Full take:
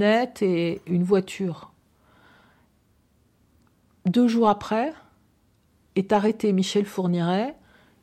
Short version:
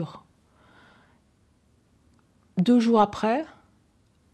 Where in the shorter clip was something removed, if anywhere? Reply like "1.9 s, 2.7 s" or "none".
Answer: none